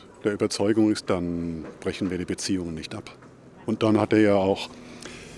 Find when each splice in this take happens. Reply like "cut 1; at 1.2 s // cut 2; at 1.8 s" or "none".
cut 1; at 1.0 s